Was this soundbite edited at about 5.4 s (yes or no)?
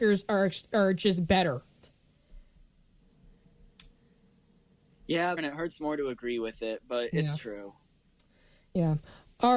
yes